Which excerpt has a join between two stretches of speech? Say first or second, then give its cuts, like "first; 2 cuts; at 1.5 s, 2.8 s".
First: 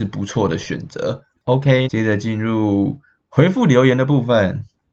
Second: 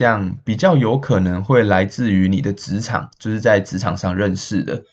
first; 1 cut; at 1.9 s